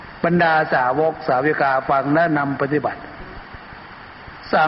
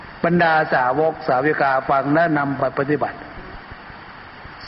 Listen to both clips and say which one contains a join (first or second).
first